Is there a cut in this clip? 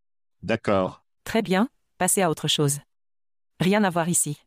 yes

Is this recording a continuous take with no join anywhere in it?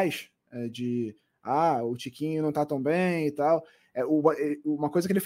yes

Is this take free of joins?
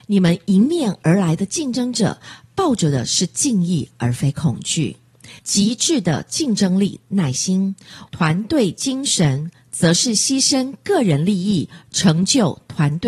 no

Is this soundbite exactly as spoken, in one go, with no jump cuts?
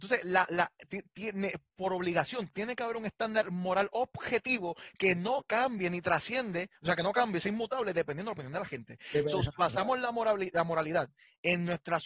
yes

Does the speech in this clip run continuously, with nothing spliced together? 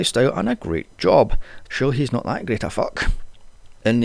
no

